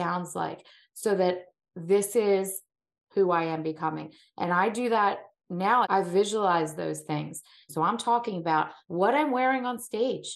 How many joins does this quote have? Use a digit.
3